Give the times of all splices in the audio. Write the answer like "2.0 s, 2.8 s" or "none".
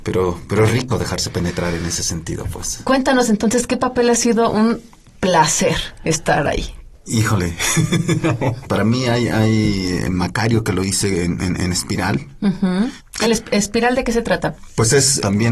13.2 s